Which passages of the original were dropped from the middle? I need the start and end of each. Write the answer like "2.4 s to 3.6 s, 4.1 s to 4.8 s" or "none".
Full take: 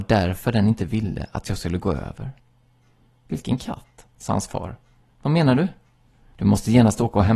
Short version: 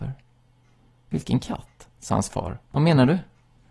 4.8 s to 5.1 s